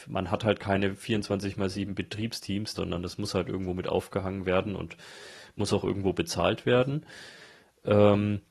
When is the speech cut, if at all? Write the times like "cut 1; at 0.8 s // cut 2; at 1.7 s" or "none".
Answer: cut 1; at 2.7 s